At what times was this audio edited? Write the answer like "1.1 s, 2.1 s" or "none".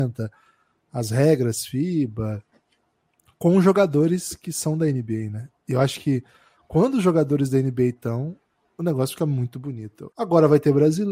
10.1 s